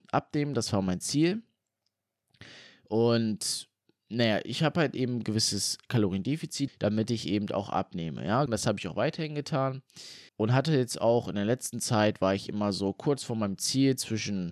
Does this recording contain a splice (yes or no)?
yes